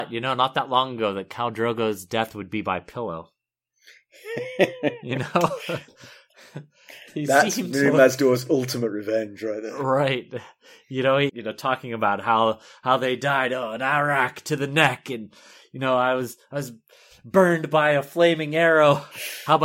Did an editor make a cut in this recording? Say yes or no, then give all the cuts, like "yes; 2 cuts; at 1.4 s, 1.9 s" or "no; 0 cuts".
yes; 1 cut; at 11.3 s